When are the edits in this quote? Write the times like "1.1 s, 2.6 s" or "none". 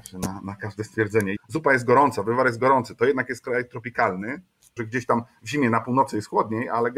1.4 s, 4.8 s